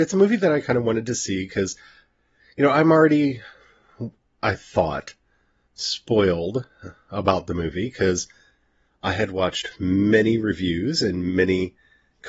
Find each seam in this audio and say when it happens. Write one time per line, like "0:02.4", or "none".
none